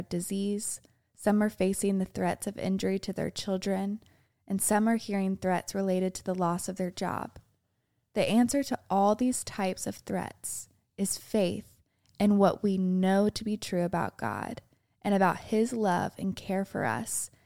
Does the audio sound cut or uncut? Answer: uncut